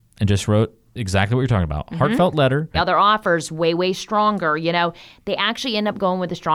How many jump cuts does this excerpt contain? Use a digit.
1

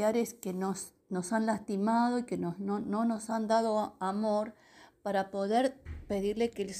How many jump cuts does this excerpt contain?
1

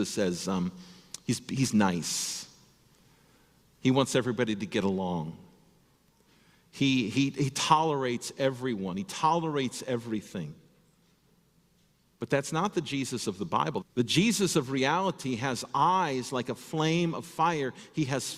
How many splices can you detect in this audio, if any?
1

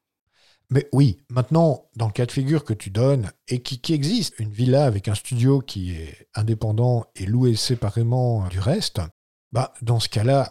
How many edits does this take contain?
2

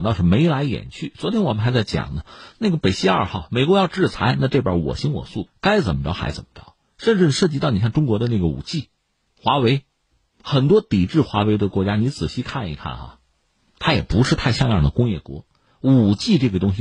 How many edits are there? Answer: 0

